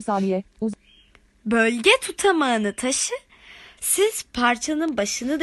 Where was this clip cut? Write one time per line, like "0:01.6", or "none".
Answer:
0:03.8